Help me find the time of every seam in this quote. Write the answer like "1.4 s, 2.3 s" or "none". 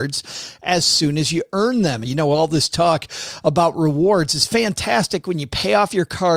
2.0 s

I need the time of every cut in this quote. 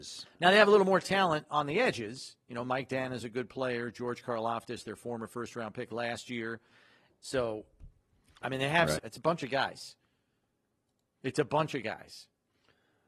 7.1 s, 9.0 s

